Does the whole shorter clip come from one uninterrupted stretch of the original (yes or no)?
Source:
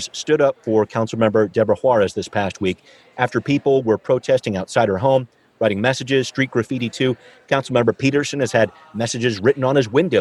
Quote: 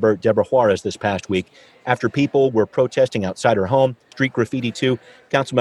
no